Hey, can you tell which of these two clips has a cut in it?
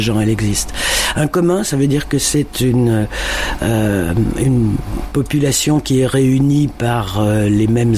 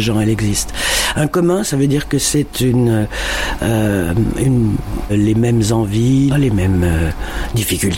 second; 2 cuts; at 5.1 s, 6.3 s

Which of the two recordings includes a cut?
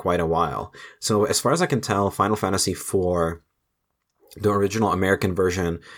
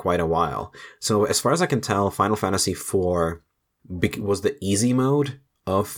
second; 1 cut; at 3.8 s

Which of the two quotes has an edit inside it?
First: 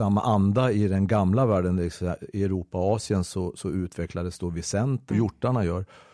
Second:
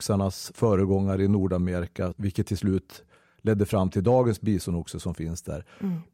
first; 1 cut; at 5.1 s

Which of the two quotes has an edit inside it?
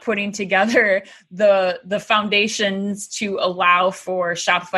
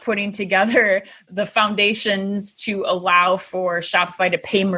second; 1 cut; at 1.3 s

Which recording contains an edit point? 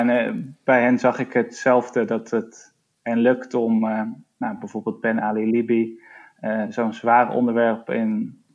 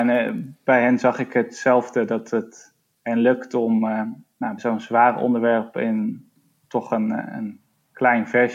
second; 1 cut; at 4.6 s

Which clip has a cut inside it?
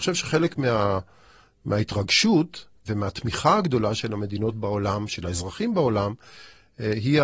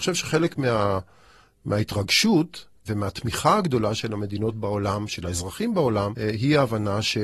second; 1 cut; at 6.1 s

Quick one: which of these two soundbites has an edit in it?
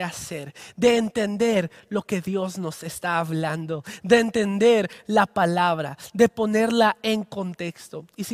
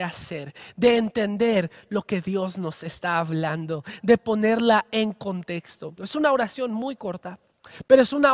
second; 2 cuts; at 4.0 s, 6.0 s

